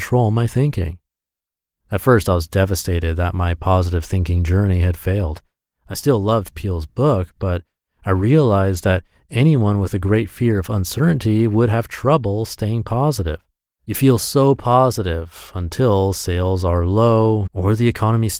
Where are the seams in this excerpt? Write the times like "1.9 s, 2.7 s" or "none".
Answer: 13.7 s, 17.5 s